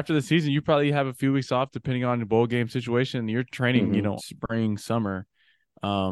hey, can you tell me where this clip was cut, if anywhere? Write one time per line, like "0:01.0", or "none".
0:04.2